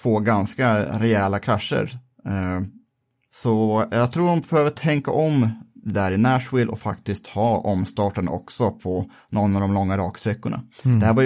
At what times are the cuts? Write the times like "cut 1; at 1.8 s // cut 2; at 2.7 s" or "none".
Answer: none